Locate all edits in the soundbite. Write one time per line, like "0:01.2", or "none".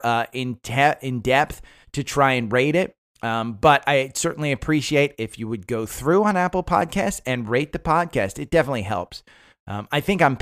none